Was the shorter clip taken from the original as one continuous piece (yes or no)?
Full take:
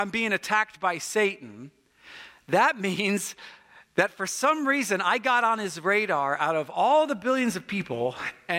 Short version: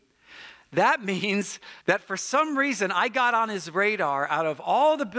no